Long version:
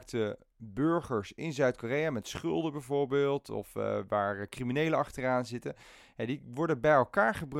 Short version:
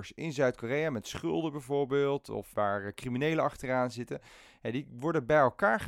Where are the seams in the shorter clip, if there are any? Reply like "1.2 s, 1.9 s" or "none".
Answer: 2.5 s